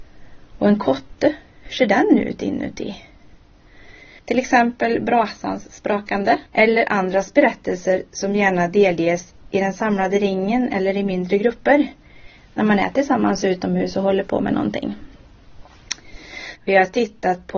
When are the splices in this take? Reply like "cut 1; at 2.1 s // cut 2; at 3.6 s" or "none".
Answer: cut 1; at 4.2 s // cut 2; at 6.5 s // cut 3; at 16.6 s

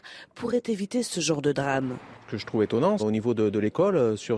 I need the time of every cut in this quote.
cut 1; at 3.0 s

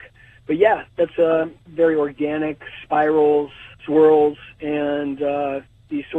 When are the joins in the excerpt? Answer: cut 1; at 1.6 s // cut 2; at 3.7 s

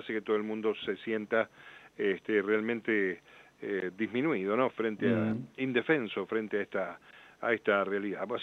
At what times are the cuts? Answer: none

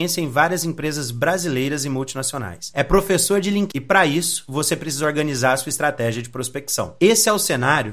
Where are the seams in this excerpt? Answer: cut 1; at 3.7 s

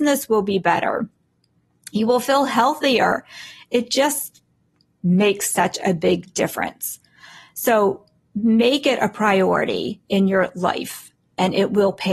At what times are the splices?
none

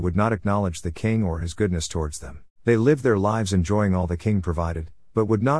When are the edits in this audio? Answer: cut 1; at 2.5 s

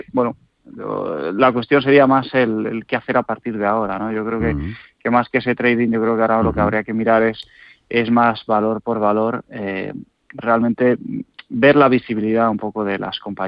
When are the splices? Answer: none

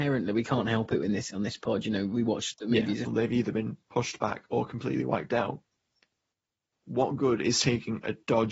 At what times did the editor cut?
cut 1; at 3.1 s

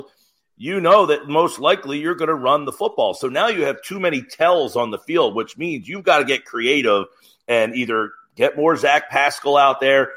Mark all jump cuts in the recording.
none

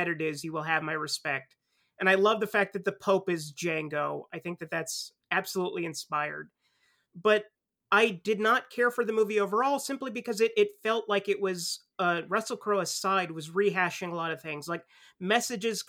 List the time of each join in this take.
none

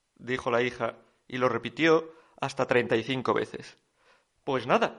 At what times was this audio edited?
none

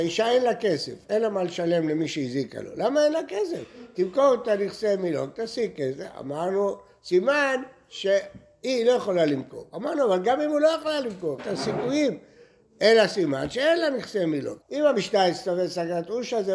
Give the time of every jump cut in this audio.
cut 1; at 11.4 s // cut 2; at 14.6 s

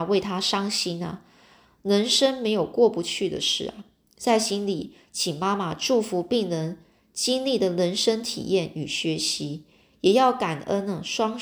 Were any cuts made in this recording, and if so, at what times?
cut 1; at 1.6 s

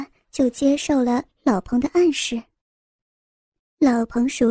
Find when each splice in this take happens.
none

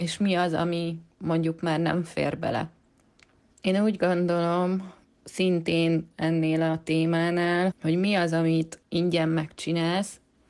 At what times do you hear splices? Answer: cut 1; at 3.5 s // cut 2; at 7.7 s

